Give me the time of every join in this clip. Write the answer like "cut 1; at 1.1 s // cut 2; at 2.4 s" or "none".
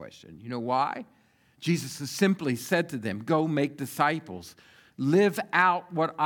cut 1; at 1.5 s // cut 2; at 4.9 s